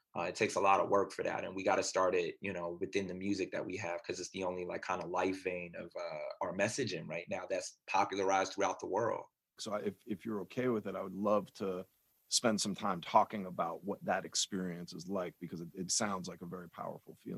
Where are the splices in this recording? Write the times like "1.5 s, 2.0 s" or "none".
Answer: 9.6 s, 15.9 s